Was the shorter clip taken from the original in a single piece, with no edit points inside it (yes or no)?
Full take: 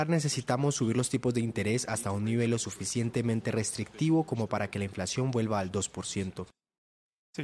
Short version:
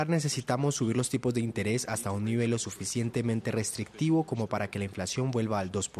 yes